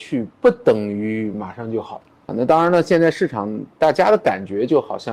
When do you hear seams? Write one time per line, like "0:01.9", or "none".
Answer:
0:02.3